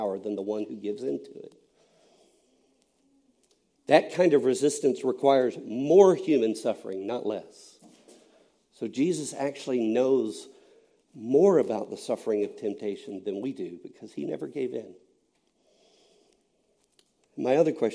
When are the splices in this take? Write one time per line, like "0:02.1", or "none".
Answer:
none